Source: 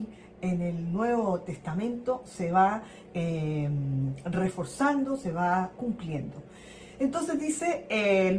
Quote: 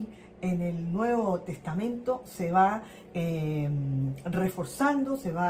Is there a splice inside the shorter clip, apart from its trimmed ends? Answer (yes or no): no